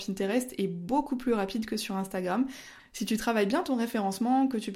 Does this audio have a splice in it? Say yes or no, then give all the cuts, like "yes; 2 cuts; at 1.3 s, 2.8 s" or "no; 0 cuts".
yes; 1 cut; at 2.8 s